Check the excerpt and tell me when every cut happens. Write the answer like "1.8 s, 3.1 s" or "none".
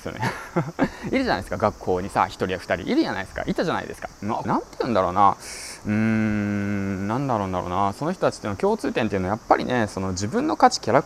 4.4 s